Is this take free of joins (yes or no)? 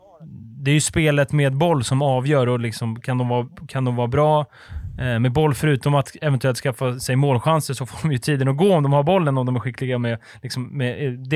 yes